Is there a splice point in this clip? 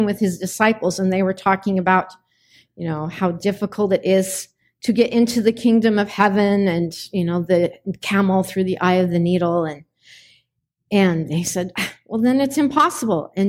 no; 0 cuts

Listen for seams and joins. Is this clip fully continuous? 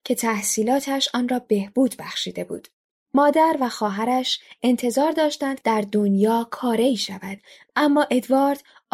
yes; 0 cuts

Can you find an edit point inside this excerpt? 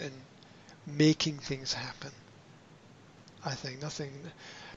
no; 0 cuts

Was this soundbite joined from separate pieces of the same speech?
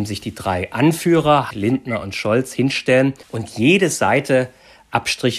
yes; 2 cuts; at 1.5 s, 3.2 s

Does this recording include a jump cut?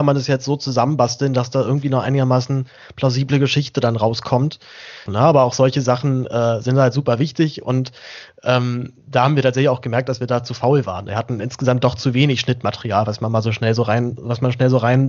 yes; 1 cut; at 5.1 s

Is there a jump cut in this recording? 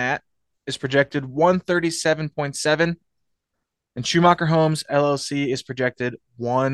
no; 0 cuts

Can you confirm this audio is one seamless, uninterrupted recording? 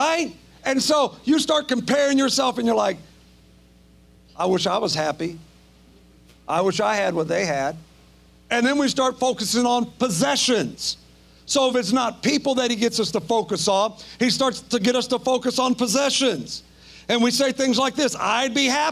yes; 0 cuts

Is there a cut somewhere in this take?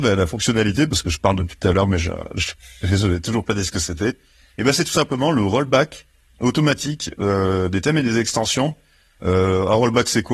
no; 0 cuts

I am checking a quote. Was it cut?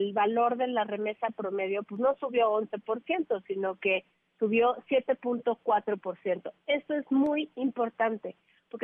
no; 0 cuts

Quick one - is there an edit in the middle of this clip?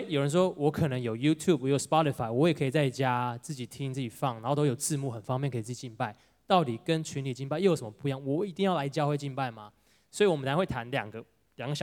no; 0 cuts

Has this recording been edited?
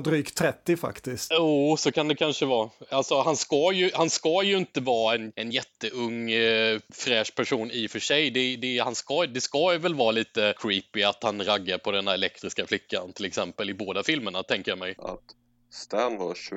yes; 2 cuts; at 1.3 s, 15.0 s

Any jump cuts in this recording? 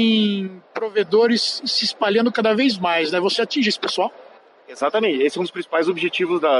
no; 0 cuts

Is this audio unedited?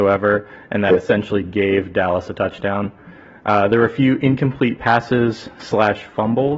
yes; 0 cuts

